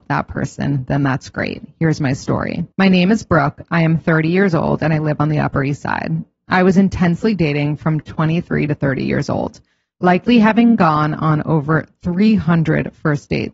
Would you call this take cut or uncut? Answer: cut